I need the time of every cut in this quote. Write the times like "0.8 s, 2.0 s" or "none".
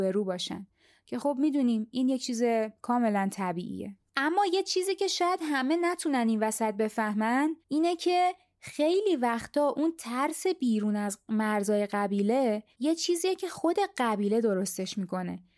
7.6 s, 12.7 s